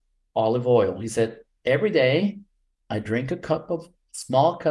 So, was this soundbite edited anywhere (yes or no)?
no